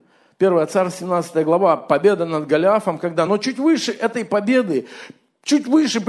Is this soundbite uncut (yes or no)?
yes